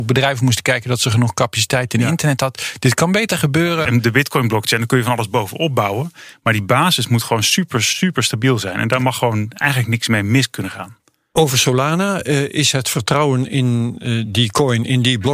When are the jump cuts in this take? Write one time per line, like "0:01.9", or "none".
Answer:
0:03.9